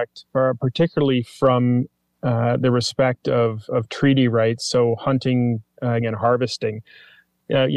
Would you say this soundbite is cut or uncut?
cut